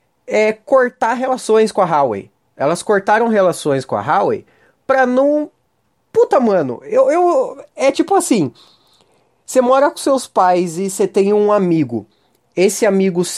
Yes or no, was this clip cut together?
no